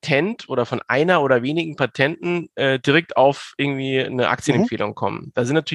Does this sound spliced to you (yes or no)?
no